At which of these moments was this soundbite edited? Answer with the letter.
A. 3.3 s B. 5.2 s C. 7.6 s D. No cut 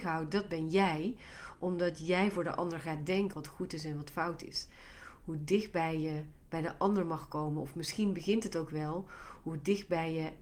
A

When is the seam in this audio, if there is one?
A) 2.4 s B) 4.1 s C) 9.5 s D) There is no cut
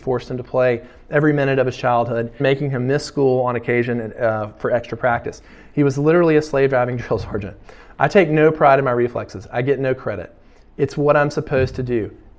A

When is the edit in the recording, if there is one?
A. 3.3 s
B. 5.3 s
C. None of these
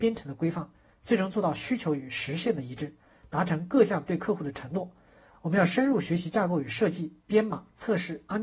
B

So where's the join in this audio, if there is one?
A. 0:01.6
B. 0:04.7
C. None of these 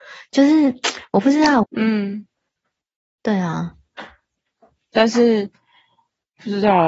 A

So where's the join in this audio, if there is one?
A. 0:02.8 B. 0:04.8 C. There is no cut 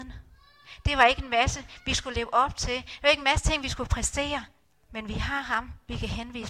C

